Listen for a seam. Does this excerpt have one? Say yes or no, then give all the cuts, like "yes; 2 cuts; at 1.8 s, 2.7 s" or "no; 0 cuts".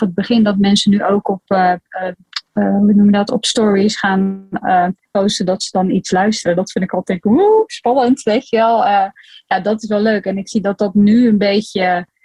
no; 0 cuts